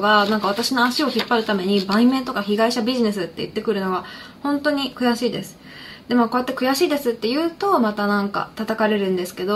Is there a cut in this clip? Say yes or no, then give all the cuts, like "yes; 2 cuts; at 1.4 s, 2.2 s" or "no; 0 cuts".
no; 0 cuts